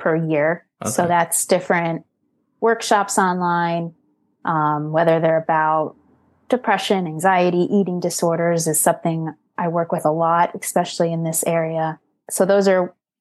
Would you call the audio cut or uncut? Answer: uncut